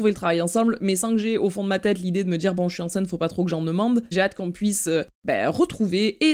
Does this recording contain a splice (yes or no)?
yes